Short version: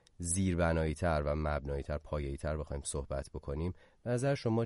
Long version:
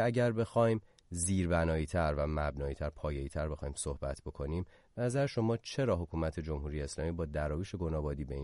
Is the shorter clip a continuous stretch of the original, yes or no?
yes